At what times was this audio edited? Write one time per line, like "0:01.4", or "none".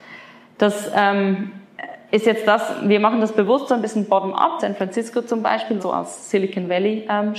0:04.6
0:05.8